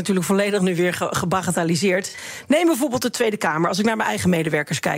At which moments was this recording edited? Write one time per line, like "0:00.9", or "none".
none